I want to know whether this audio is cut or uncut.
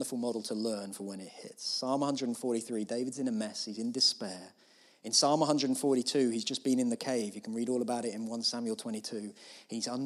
uncut